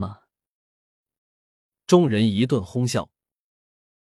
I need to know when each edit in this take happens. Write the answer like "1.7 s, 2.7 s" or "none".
1.2 s